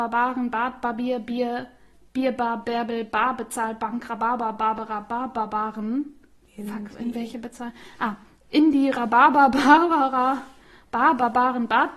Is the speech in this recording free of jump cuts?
yes; 0 cuts

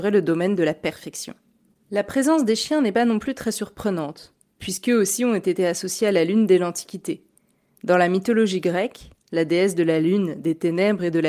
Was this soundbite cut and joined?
yes; 1 cut; at 9.3 s

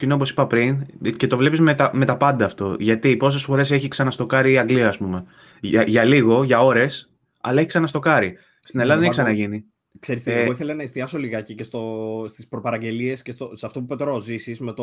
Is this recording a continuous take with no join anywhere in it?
yes; 0 cuts

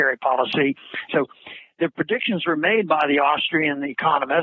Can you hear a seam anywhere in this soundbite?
yes; 1 cut; at 1.1 s

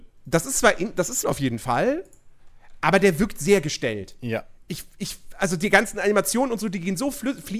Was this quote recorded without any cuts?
no; 1 cut; at 1.2 s

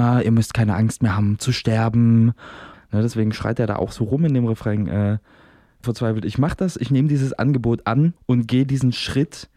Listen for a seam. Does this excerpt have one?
yes; 3 cuts; at 2.7 s, 5.8 s, 8.2 s

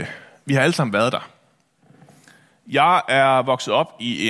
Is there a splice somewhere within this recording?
no; 0 cuts

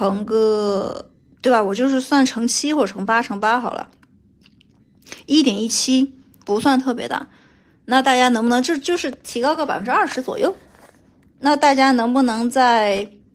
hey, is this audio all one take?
no; 1 cut; at 6.4 s

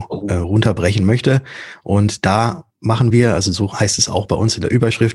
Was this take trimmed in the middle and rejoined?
no; 0 cuts

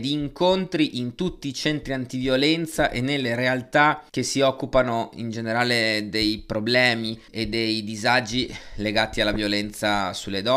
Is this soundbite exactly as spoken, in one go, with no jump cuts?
no; 2 cuts; at 4.1 s, 7.3 s

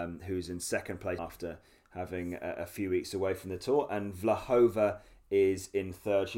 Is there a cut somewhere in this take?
yes; 1 cut; at 1.2 s

